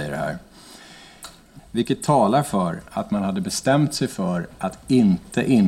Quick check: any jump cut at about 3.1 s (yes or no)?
no